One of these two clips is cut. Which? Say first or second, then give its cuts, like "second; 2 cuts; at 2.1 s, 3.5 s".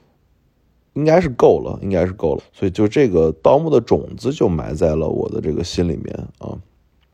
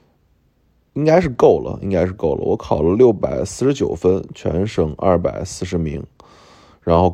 first; 1 cut; at 2.4 s